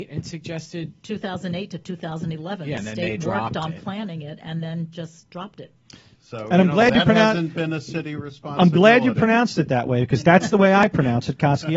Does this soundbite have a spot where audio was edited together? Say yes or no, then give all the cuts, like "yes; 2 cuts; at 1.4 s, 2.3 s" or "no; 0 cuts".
yes; 1 cut; at 6.1 s